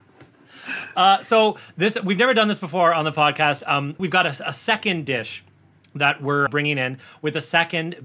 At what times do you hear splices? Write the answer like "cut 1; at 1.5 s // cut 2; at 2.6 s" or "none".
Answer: cut 1; at 4.0 s // cut 2; at 6.5 s

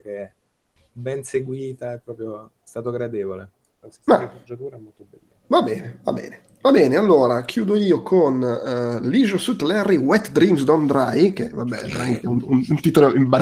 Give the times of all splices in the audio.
cut 1; at 3.8 s // cut 2; at 5.4 s

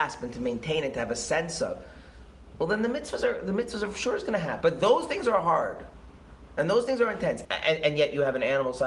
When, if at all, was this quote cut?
cut 1; at 4.6 s // cut 2; at 7.4 s

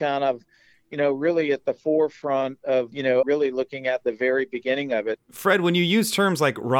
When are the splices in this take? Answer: cut 1; at 3.2 s // cut 2; at 5.2 s

